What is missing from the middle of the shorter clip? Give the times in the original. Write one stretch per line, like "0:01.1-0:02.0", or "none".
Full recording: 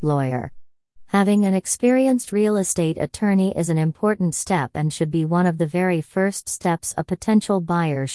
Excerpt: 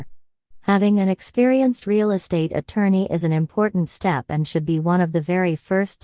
none

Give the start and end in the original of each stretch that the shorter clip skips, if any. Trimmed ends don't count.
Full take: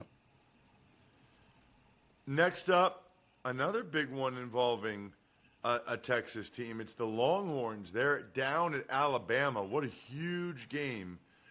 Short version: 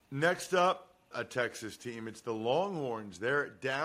0:03.3-0:05.8

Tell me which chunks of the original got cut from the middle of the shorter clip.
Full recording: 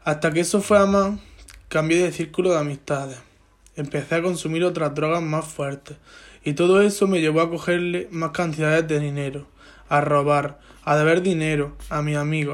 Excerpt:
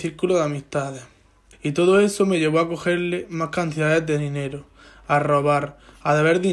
0:03.7-0:06.3

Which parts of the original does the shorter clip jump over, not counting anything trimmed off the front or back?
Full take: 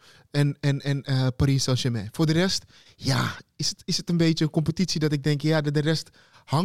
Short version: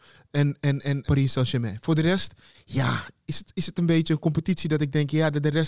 0:01.0-0:01.4

